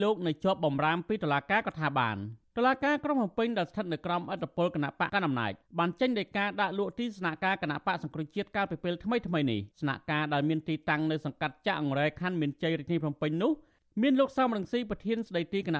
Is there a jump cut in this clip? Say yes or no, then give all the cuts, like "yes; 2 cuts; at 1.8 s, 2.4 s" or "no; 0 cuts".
yes; 2 cuts; at 5.1 s, 9.7 s